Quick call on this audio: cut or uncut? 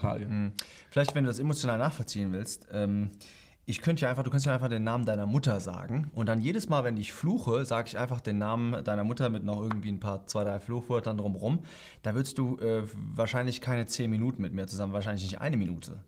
uncut